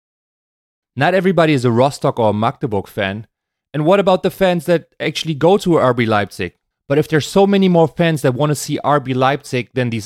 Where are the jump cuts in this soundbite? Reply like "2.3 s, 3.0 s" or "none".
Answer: none

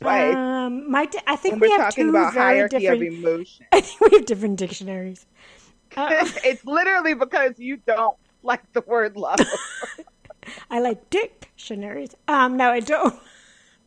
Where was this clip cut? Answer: none

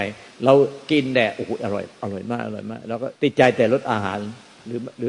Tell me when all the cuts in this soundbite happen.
3.1 s

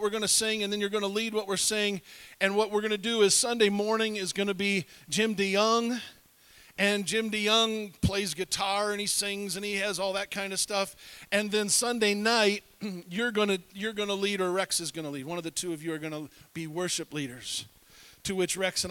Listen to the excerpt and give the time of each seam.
none

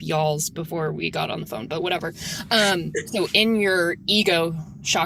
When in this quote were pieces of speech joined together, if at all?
3.0 s

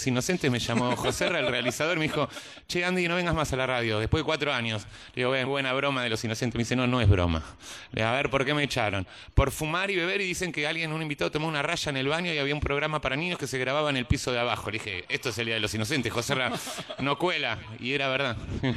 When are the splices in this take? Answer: 5.5 s

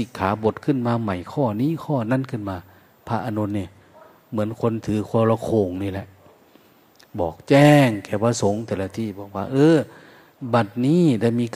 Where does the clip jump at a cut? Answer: none

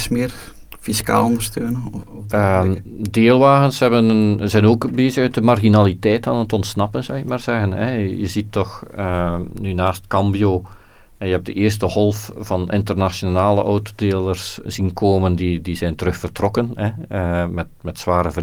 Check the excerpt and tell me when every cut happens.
14.7 s

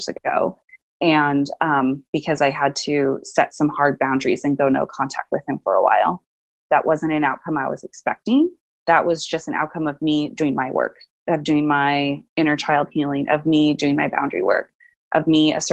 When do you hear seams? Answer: none

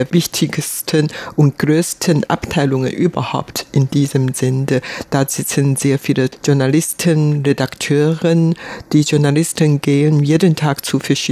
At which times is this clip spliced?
none

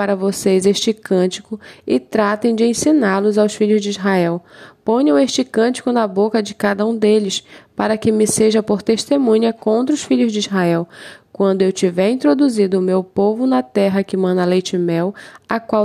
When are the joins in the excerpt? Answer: none

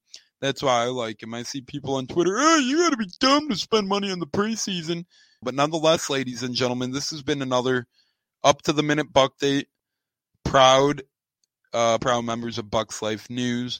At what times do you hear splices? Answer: 5.4 s, 12.0 s

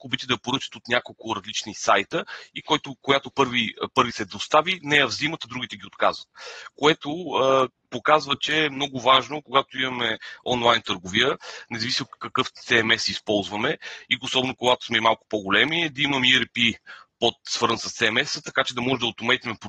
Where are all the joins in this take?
4.1 s

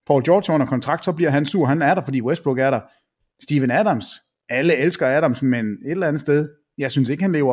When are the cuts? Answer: none

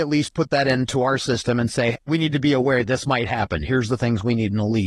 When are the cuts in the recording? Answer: 1.9 s

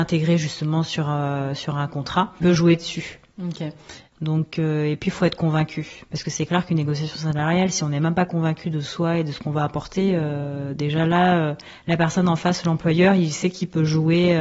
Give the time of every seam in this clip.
2.4 s, 4.1 s

